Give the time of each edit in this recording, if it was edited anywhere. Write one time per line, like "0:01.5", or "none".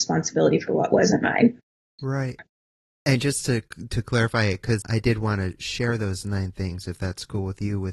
0:02.4
0:04.8